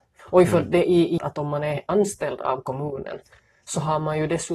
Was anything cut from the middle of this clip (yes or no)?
yes